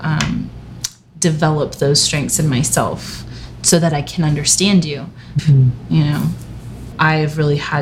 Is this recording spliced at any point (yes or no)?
yes